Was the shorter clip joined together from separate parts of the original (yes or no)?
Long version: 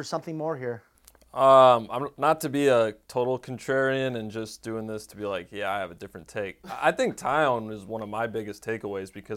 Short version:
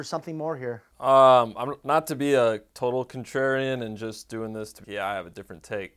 yes